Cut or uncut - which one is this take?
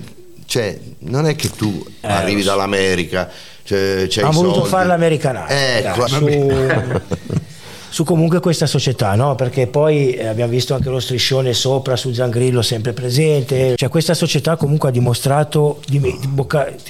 cut